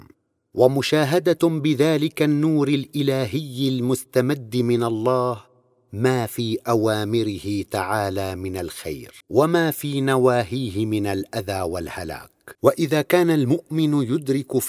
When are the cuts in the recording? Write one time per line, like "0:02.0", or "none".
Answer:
0:09.2
0:12.5